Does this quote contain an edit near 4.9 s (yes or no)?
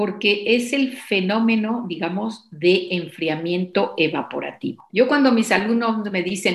yes